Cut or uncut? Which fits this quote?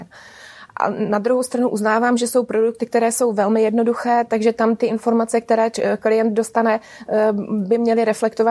uncut